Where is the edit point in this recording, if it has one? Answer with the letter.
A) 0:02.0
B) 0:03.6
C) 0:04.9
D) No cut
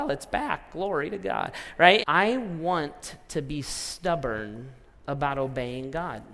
A